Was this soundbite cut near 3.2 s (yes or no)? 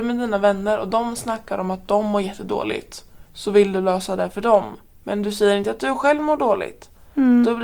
yes